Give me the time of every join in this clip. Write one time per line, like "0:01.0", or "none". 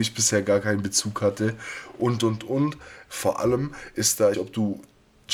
0:03.1
0:04.3